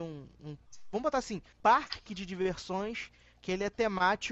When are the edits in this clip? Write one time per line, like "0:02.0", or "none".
0:01.5